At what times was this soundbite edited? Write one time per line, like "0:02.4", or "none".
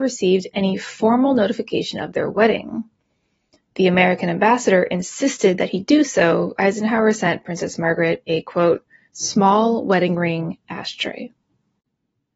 0:06.6